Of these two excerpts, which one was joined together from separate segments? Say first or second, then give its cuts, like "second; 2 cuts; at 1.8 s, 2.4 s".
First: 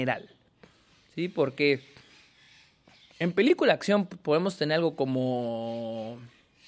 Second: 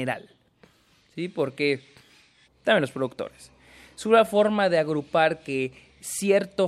second; 1 cut; at 2.4 s